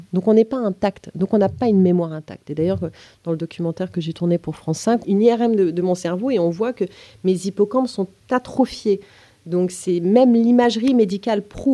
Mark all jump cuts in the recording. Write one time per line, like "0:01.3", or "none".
0:05.0